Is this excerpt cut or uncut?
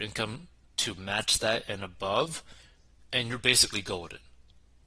uncut